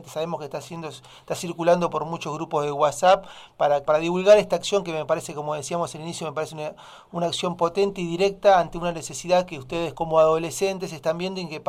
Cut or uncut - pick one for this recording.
cut